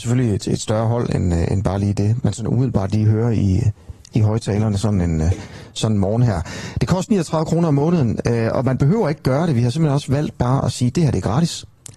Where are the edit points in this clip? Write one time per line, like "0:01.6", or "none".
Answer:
0:02.2